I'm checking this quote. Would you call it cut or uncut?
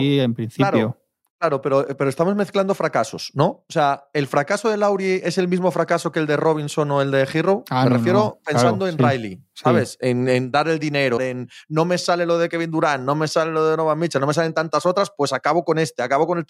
cut